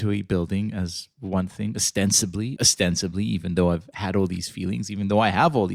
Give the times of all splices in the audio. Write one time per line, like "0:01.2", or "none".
0:02.6